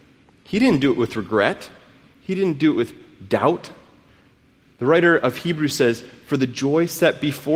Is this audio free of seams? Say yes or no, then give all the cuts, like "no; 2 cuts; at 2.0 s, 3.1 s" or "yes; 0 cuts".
yes; 0 cuts